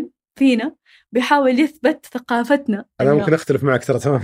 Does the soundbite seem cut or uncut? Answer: uncut